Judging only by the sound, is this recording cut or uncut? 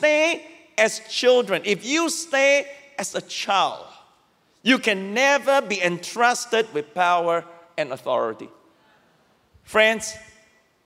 uncut